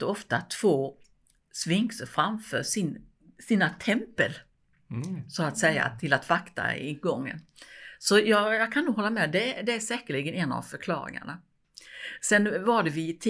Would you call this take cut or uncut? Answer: uncut